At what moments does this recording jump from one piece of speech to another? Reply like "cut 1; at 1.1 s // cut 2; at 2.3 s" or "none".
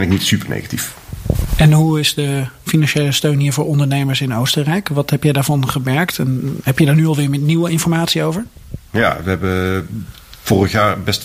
none